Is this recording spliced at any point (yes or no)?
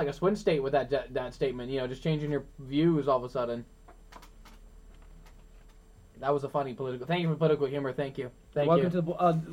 no